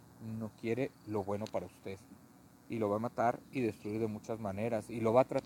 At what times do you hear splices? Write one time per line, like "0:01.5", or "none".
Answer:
none